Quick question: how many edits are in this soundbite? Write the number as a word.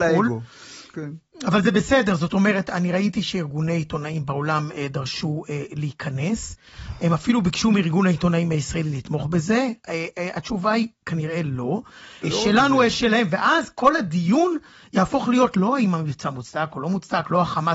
one